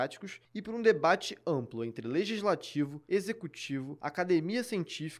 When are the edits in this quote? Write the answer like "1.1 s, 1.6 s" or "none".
none